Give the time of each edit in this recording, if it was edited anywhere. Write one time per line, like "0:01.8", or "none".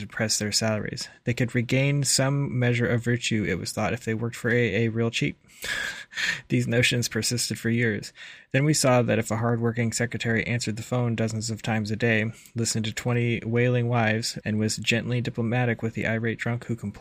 0:14.4